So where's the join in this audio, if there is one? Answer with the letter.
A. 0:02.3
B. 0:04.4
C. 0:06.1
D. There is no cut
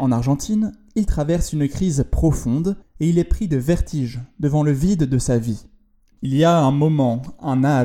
C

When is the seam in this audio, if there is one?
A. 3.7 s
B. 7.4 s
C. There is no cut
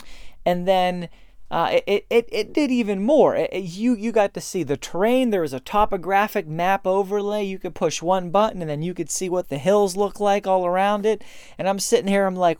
C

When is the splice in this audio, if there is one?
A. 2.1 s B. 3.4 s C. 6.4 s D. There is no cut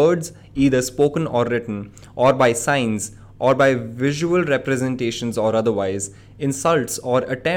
D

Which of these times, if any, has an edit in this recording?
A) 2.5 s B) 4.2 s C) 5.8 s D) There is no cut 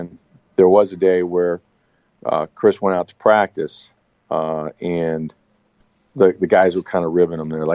D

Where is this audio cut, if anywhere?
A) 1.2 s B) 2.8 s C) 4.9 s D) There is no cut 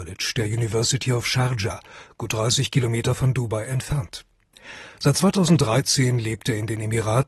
D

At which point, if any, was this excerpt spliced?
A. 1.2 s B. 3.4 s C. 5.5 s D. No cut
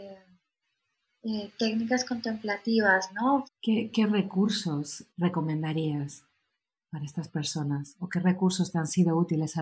B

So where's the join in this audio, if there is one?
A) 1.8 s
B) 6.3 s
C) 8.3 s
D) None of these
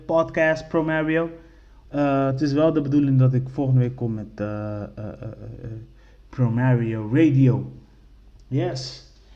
A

